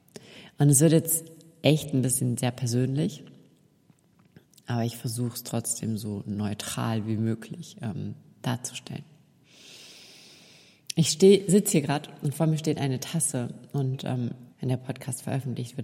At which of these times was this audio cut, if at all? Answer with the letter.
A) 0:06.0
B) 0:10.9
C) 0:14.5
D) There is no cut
C